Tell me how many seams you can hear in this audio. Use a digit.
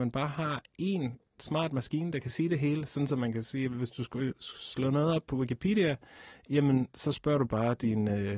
0